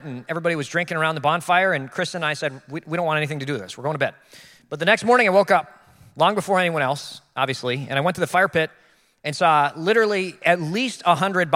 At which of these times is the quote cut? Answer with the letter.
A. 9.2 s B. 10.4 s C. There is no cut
B